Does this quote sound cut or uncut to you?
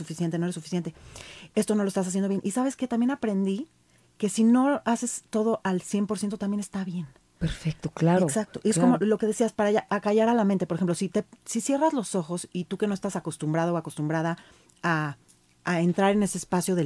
uncut